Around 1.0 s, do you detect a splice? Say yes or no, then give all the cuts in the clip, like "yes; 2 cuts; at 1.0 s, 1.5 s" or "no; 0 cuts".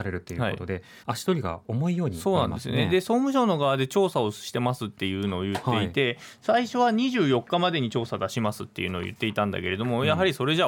yes; 1 cut; at 1.0 s